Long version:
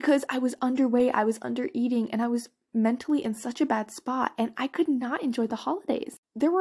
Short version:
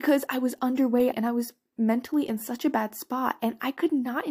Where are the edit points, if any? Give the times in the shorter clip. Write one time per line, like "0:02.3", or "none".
0:01.1